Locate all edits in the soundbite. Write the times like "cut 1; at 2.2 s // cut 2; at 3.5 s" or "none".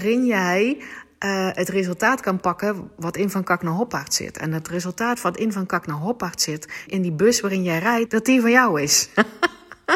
cut 1; at 6.9 s // cut 2; at 8.1 s